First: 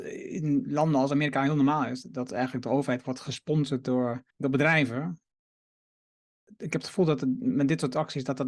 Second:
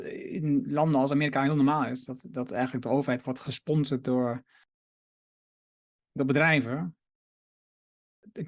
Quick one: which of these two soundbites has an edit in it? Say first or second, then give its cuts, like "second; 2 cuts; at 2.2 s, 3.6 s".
first; 2 cuts; at 2.0 s, 4.3 s